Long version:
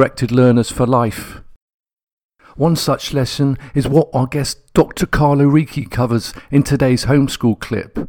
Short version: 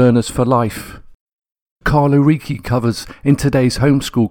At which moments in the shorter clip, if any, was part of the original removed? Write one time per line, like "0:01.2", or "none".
0:01.8